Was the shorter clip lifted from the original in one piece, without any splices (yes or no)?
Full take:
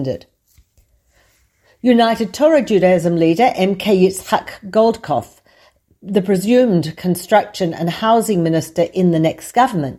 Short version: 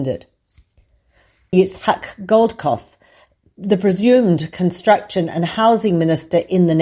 no